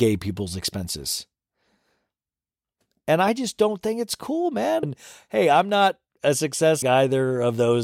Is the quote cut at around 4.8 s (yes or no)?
yes